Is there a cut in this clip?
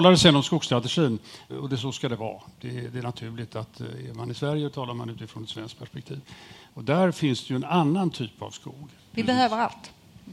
yes; 3 cuts; at 1.5 s, 6.7 s, 9.0 s

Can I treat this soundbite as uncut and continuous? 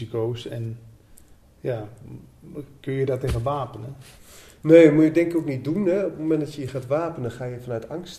yes; 0 cuts

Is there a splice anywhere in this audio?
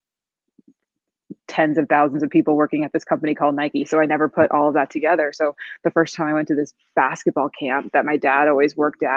no; 0 cuts

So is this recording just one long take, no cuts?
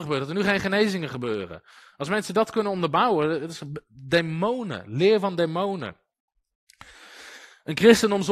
yes; 0 cuts

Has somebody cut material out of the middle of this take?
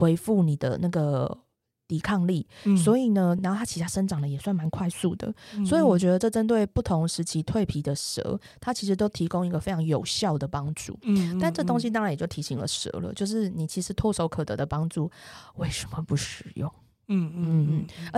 no; 0 cuts

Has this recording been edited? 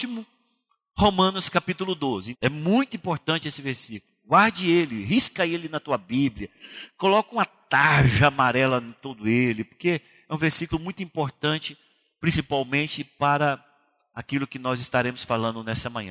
yes; 1 cut; at 2.3 s

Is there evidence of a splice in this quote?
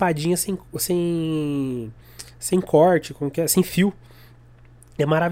no; 0 cuts

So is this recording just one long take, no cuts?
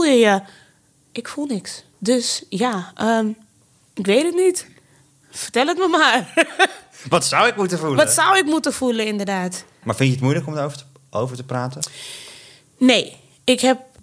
no; 1 cut; at 1.9 s

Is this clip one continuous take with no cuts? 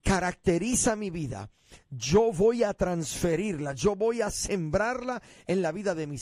yes; 0 cuts

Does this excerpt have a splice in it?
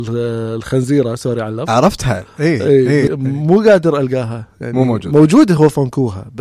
yes; 1 cut; at 3.1 s

